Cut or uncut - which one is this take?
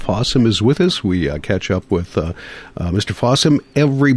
uncut